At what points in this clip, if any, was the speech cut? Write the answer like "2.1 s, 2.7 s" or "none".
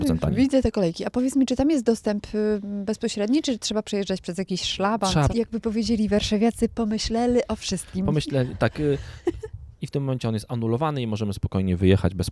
5.3 s, 9.7 s